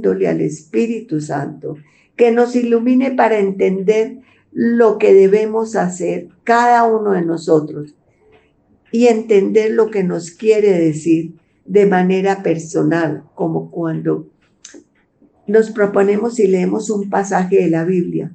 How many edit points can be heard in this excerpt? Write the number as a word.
one